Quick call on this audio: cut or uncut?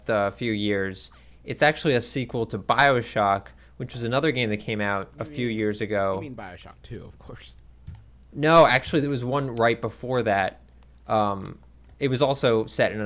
uncut